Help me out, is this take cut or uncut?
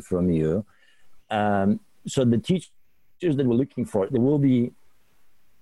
uncut